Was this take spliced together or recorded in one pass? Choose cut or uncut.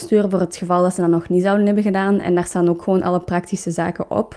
uncut